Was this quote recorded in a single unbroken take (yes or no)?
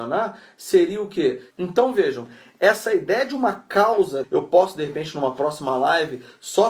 no